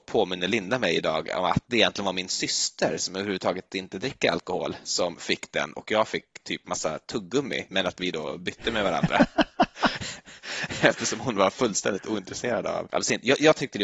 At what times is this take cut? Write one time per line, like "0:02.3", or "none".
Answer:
none